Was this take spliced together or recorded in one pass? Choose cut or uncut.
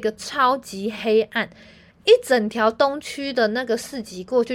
uncut